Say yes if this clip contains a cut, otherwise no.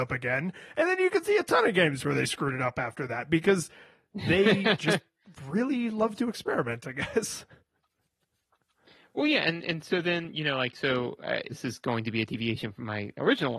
yes